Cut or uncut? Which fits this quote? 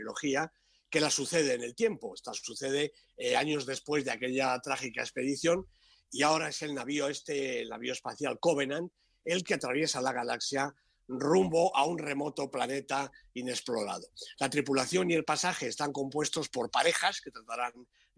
uncut